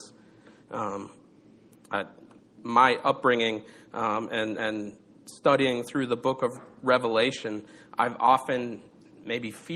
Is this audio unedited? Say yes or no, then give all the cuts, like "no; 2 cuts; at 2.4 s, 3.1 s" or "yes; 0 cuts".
yes; 0 cuts